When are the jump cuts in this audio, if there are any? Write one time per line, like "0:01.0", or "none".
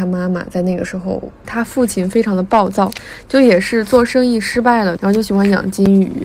0:01.4
0:05.0